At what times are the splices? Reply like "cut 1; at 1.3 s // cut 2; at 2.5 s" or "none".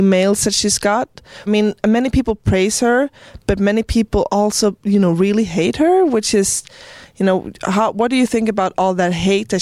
cut 1; at 1.5 s